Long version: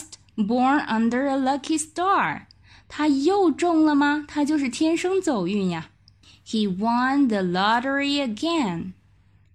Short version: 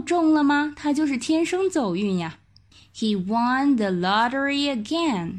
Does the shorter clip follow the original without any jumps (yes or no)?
yes